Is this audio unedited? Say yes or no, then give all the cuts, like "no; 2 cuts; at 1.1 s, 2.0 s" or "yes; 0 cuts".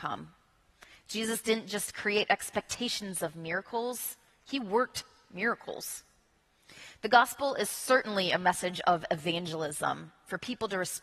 yes; 0 cuts